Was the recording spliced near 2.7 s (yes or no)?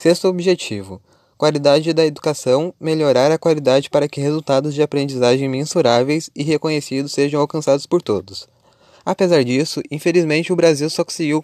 no